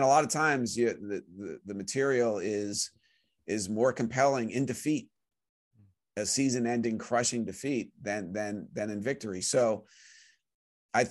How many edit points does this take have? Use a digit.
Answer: 0